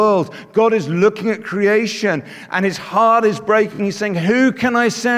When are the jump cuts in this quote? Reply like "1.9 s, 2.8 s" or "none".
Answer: none